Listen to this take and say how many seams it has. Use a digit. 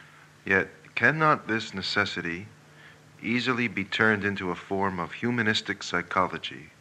0